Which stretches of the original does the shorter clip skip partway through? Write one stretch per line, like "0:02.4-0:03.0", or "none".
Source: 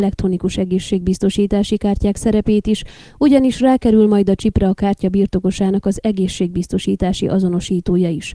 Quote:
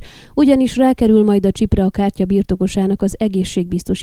none